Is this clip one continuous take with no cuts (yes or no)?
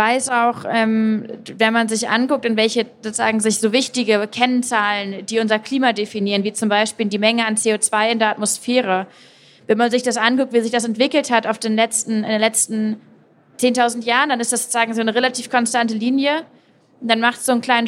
yes